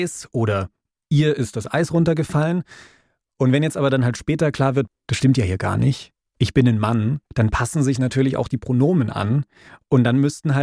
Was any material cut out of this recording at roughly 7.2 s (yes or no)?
yes